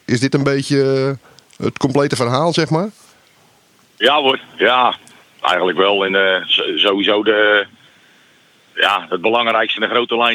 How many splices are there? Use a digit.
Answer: 0